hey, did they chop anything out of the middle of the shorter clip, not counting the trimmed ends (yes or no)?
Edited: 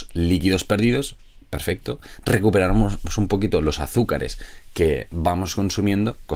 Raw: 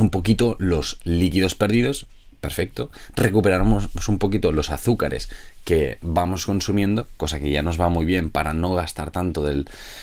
no